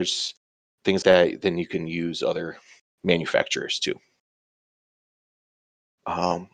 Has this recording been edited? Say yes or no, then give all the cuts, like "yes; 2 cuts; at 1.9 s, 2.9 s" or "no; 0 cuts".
yes; 1 cut; at 1.0 s